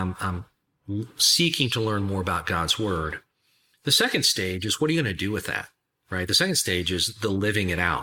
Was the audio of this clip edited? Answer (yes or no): no